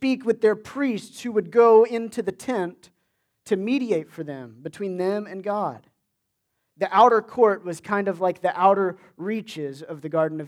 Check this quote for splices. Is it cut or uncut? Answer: uncut